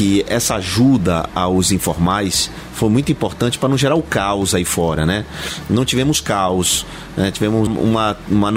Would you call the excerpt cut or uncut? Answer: cut